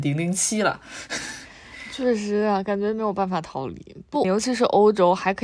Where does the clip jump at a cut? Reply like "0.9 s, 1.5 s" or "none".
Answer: 4.2 s